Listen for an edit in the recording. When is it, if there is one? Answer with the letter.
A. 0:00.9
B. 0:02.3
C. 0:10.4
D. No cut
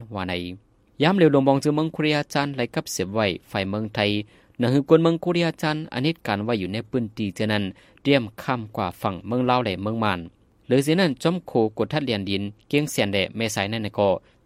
D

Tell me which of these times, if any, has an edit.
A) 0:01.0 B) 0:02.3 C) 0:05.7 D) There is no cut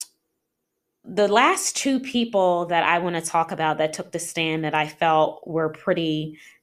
A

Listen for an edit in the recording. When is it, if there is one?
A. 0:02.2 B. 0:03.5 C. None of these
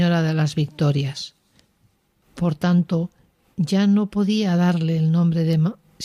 A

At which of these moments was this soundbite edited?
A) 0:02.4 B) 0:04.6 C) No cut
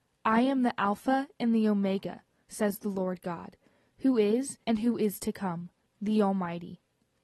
B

